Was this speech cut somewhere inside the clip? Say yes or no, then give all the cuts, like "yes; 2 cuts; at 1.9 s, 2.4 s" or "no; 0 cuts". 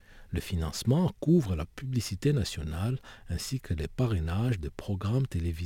no; 0 cuts